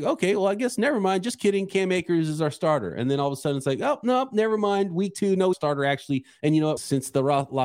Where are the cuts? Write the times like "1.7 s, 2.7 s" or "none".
5.5 s, 6.8 s